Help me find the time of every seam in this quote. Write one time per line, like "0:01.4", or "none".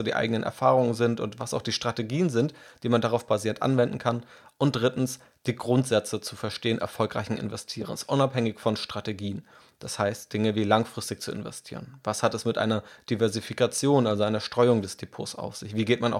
none